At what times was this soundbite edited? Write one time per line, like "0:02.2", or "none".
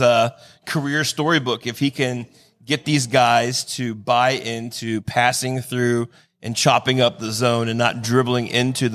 none